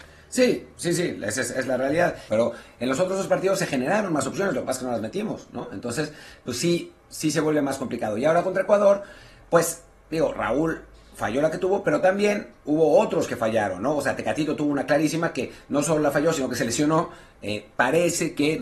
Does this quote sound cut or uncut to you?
cut